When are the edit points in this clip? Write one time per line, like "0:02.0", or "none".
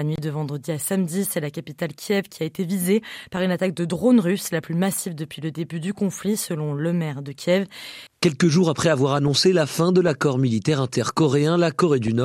0:08.1